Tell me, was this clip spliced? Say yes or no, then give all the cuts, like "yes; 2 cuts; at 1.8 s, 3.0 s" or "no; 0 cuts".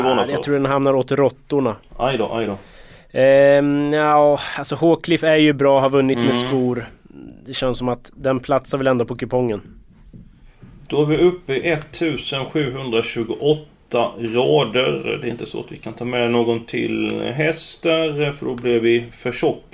no; 0 cuts